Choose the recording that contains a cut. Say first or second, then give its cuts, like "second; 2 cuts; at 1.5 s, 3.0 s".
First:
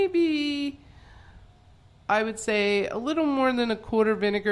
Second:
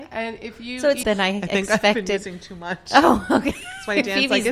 second; 1 cut; at 1.0 s